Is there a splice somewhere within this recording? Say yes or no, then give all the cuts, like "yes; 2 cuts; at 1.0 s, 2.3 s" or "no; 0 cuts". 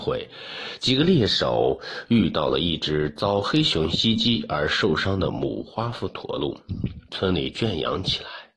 yes; 1 cut; at 7.1 s